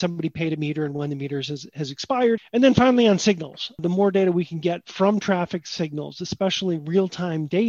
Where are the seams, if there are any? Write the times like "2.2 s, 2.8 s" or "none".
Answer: 2.4 s